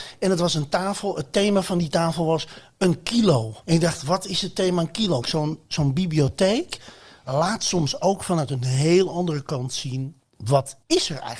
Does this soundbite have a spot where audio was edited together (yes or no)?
yes